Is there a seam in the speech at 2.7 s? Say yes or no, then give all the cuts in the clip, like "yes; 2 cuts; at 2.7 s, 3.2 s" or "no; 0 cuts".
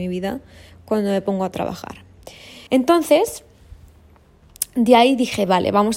yes; 1 cut; at 2.7 s